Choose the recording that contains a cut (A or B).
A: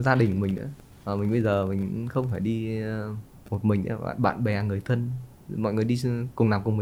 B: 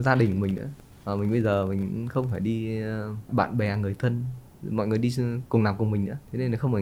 B